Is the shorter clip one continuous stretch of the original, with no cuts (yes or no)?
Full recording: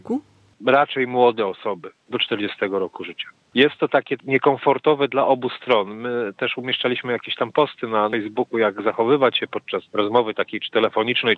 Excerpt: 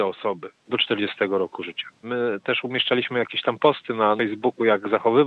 no